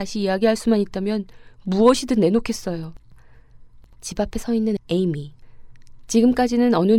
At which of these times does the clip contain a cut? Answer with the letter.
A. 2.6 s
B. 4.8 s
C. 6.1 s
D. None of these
B